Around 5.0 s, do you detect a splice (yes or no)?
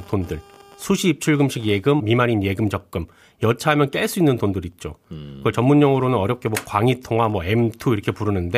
no